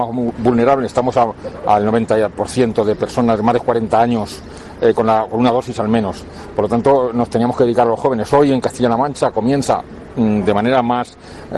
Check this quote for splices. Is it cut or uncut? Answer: uncut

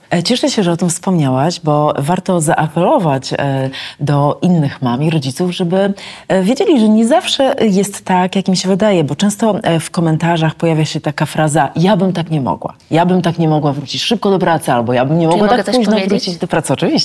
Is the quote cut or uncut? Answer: uncut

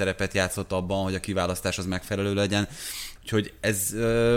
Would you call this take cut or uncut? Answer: cut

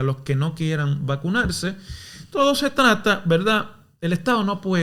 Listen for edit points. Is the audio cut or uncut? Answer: uncut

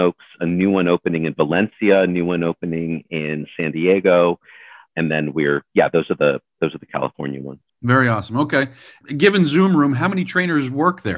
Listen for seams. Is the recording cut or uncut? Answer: uncut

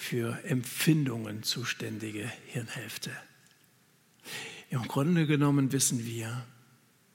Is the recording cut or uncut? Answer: uncut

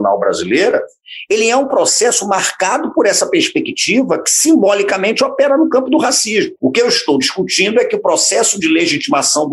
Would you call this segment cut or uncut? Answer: cut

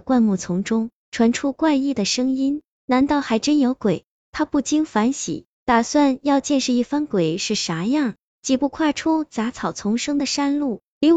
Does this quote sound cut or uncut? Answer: uncut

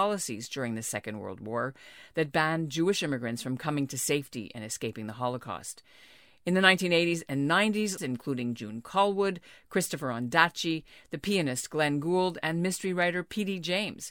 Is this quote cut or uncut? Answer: cut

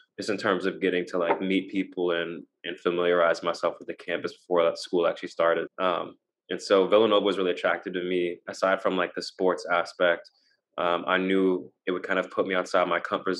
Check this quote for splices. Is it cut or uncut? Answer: cut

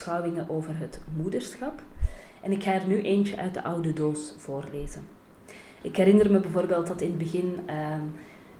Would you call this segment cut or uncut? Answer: cut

